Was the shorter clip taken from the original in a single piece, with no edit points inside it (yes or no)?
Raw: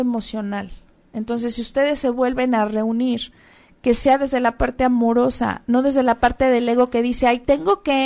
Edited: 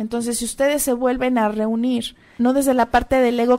no